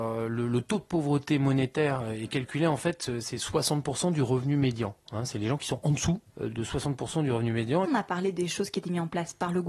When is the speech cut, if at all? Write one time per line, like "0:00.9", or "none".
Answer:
0:06.3
0:07.8

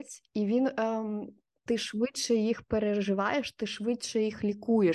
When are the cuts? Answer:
0:01.7

